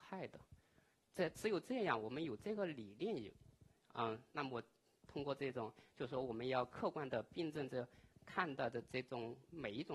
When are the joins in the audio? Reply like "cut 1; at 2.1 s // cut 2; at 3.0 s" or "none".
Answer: none